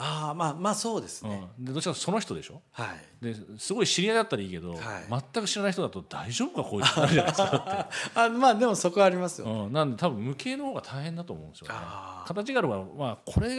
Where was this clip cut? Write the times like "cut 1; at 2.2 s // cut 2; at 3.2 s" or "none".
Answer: none